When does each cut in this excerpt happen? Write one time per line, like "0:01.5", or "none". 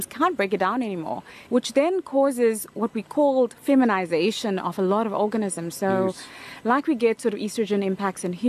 0:01.5